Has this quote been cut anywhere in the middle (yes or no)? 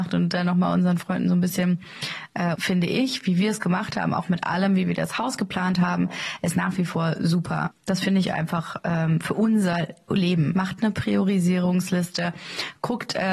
yes